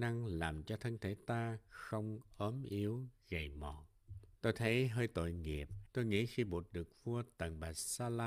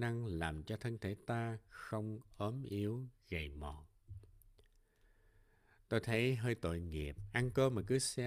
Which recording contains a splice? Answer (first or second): first